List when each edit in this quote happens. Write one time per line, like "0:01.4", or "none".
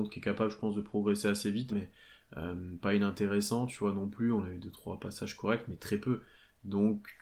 0:01.7